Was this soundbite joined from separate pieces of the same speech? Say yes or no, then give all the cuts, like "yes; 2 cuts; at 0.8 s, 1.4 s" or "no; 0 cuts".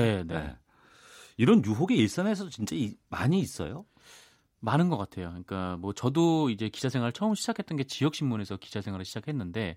no; 0 cuts